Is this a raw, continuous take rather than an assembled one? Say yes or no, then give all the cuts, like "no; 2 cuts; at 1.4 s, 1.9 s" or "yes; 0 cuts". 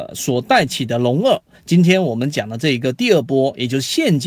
no; 1 cut; at 1.5 s